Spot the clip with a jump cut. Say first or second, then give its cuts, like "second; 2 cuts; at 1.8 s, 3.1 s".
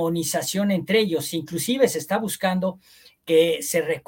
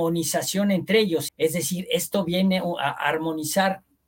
second; 1 cut; at 1.3 s